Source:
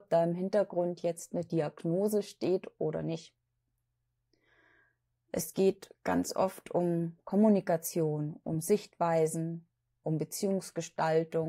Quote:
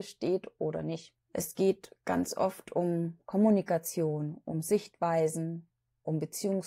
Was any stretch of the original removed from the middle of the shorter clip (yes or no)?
yes